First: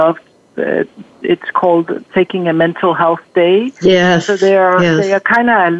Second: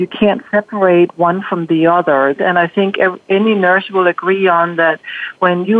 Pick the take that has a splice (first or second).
second